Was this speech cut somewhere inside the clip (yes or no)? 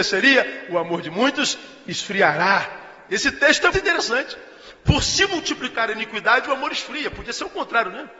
yes